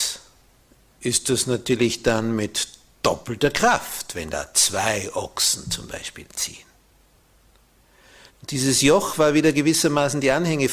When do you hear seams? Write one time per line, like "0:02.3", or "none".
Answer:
0:08.3